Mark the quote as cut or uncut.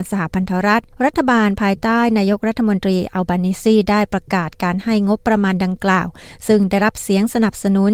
cut